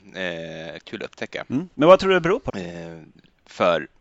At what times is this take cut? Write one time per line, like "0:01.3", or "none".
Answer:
0:02.5

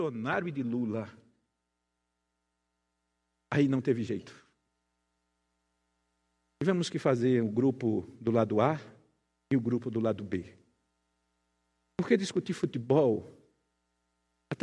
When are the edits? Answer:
none

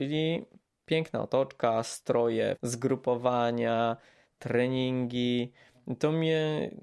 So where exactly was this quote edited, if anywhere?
0:02.6

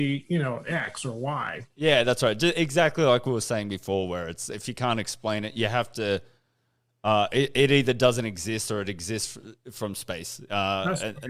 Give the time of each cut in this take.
none

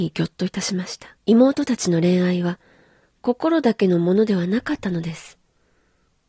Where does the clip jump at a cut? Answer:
0:01.2

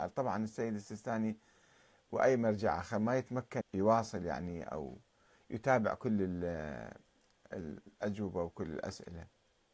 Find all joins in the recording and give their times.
0:03.6

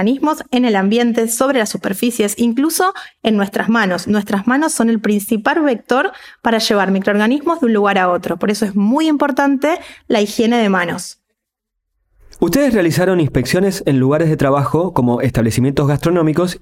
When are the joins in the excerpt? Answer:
none

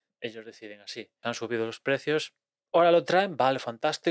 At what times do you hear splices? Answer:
0:01.2
0:02.6

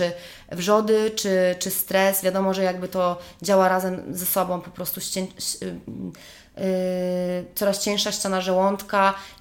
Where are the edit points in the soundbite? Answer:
none

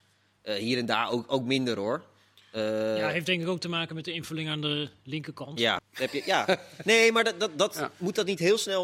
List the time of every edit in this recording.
0:05.8

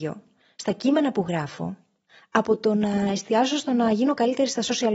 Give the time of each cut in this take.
none

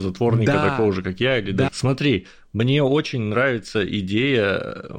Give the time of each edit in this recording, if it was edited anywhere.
0:01.7

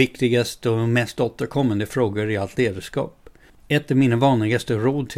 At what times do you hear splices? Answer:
0:03.5

